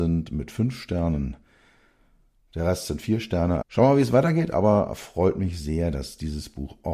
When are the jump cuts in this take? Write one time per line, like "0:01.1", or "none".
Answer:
0:03.6